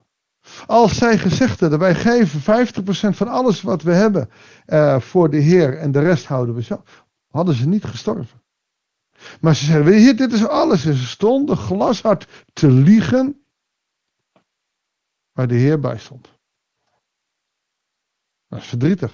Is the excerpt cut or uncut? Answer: uncut